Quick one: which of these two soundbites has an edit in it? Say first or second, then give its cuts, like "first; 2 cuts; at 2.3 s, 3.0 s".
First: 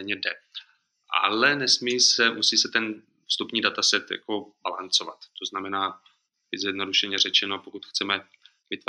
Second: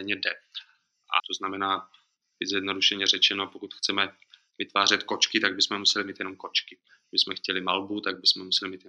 second; 1 cut; at 1.2 s